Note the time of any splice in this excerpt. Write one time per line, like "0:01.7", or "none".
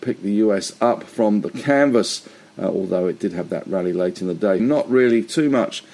0:04.6